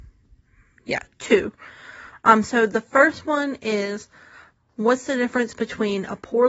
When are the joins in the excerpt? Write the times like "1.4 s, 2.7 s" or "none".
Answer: none